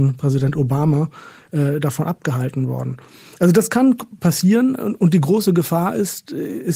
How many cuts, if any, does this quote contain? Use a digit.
0